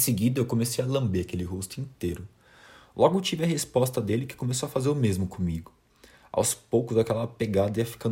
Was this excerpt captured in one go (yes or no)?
yes